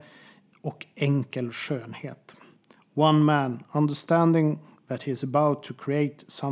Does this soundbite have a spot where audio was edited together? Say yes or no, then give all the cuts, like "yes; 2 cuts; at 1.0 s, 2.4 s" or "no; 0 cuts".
no; 0 cuts